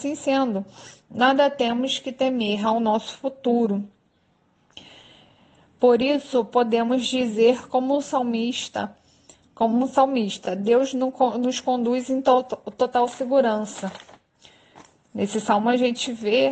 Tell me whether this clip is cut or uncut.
uncut